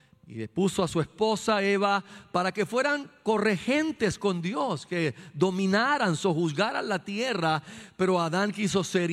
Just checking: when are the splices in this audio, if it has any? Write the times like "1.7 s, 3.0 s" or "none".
none